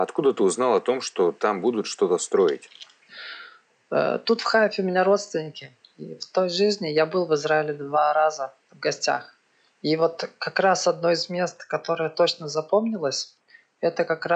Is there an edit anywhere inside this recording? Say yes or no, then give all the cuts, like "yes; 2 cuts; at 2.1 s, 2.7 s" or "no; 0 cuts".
no; 0 cuts